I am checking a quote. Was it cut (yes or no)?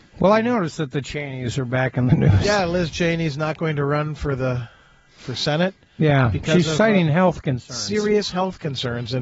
no